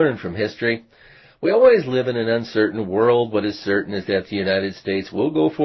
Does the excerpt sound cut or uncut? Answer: uncut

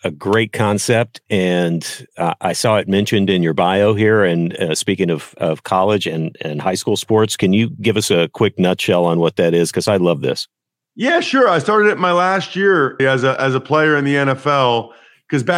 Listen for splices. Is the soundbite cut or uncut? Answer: cut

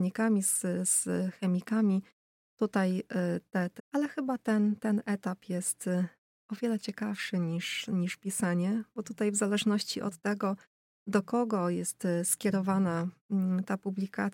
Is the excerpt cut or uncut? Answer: cut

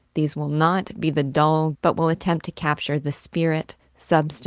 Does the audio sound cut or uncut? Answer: cut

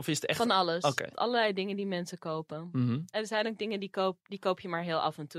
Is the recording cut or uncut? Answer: cut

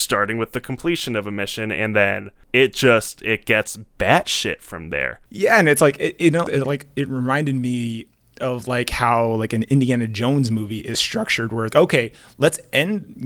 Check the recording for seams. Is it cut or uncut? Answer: cut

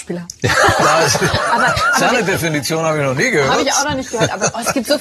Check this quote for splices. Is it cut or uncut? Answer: uncut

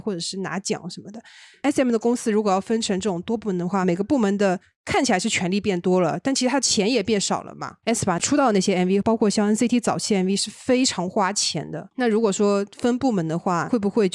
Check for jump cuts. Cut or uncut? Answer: uncut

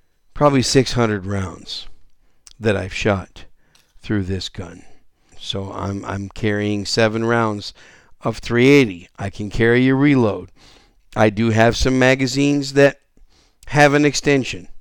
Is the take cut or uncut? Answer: cut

